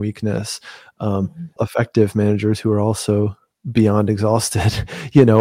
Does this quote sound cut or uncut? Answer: cut